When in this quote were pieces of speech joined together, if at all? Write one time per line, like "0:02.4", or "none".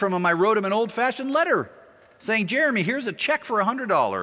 none

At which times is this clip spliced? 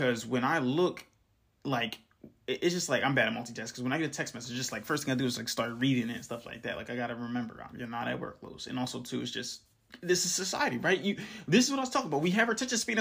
none

